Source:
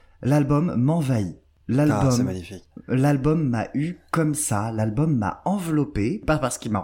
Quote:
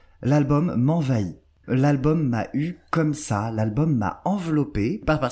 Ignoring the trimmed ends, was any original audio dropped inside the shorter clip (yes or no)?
yes